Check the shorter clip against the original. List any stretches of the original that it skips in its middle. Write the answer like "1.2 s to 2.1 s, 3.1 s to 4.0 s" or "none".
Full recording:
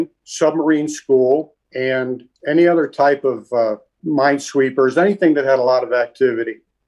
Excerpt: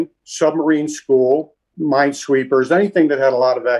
1.6 s to 3.9 s